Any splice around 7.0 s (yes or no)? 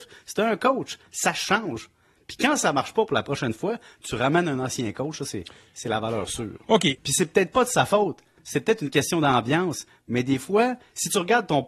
yes